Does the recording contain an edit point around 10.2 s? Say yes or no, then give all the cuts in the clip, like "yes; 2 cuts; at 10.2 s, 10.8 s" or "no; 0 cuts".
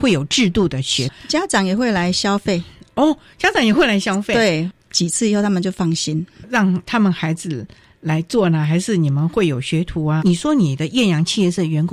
yes; 1 cut; at 10.2 s